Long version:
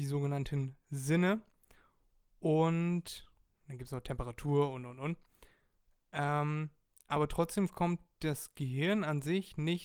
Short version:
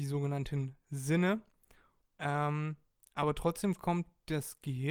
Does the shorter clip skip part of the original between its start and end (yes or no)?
yes